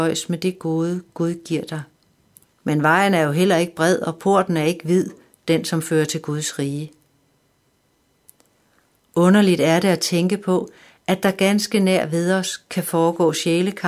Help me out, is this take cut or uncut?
cut